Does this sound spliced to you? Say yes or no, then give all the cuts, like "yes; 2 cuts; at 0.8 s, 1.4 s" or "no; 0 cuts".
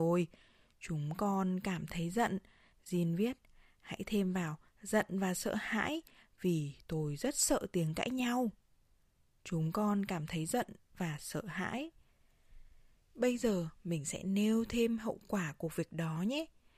no; 0 cuts